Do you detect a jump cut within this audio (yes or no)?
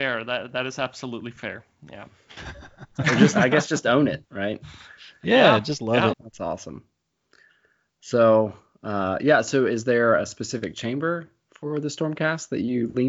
yes